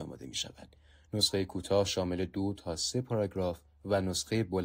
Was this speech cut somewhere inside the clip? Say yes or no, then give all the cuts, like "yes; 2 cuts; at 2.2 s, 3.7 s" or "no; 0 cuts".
no; 0 cuts